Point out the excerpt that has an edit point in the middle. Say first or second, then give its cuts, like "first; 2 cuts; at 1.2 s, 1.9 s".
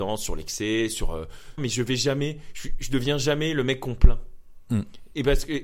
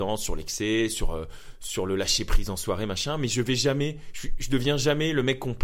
first; 1 cut; at 1.6 s